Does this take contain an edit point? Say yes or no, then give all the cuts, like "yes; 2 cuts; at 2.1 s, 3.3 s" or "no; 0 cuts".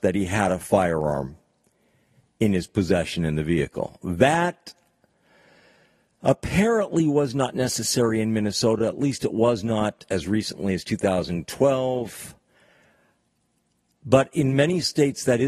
no; 0 cuts